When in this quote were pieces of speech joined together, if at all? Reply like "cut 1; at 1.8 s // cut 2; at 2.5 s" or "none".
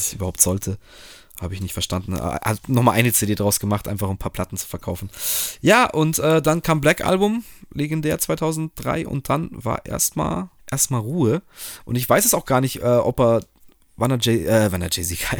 cut 1; at 10.6 s